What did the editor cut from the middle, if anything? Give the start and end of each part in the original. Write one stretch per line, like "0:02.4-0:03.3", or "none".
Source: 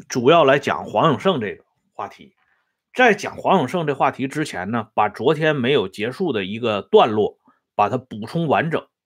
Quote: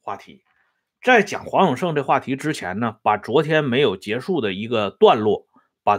none